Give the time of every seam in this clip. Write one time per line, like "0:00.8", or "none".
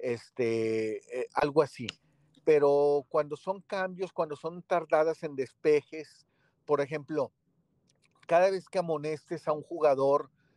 none